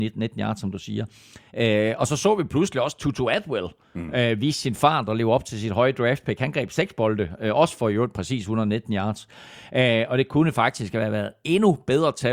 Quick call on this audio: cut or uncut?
uncut